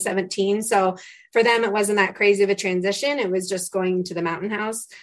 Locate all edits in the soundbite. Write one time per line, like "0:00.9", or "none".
none